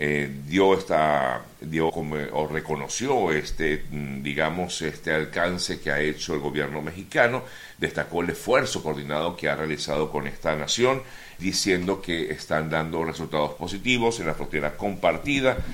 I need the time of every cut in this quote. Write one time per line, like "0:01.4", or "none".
0:01.9
0:11.4